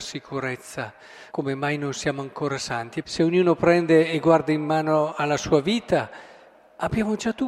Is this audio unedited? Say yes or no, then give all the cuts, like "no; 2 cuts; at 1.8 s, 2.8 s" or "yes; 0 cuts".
no; 2 cuts; at 1.3 s, 3.0 s